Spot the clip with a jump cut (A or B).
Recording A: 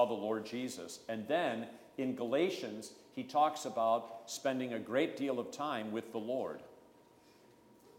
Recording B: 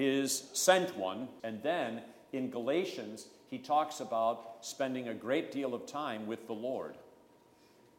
B